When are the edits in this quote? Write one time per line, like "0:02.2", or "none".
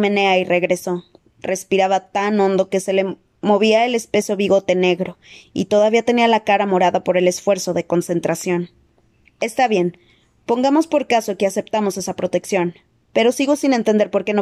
0:09.2